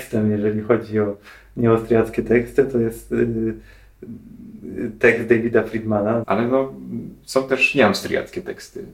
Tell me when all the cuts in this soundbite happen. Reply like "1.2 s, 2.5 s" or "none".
6.2 s